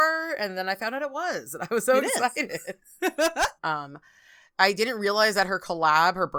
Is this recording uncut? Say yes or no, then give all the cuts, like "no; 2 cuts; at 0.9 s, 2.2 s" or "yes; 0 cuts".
no; 1 cut; at 3.6 s